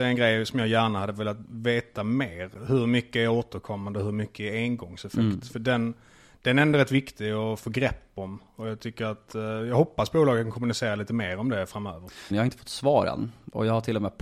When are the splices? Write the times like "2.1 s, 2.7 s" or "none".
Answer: 12.3 s